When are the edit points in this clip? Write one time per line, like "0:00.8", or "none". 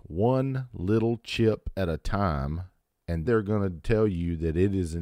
0:03.2